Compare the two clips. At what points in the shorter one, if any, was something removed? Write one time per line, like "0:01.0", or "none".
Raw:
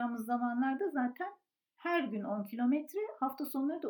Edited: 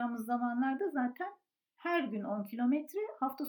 none